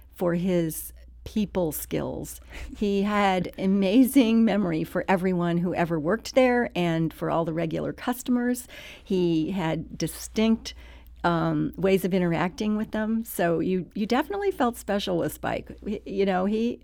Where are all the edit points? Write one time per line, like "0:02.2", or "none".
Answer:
none